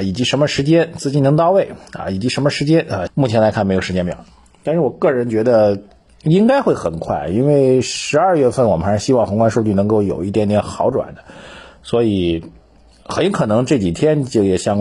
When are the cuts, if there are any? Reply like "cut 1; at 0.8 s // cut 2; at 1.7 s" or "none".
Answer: cut 1; at 3.1 s